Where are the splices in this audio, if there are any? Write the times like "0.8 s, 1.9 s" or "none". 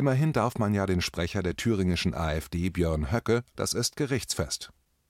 3.5 s